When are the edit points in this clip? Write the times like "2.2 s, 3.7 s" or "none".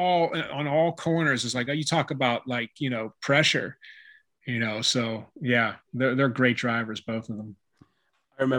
1.7 s